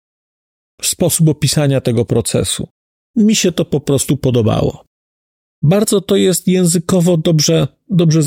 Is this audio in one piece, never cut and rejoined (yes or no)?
no